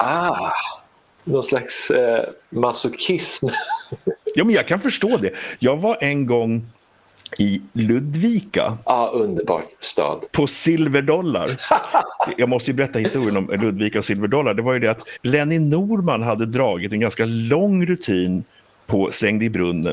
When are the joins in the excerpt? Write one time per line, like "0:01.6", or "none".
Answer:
none